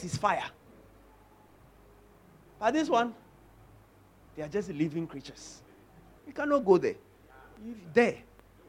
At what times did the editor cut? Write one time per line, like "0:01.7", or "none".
0:06.2